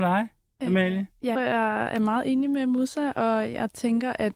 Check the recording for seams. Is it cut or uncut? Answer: cut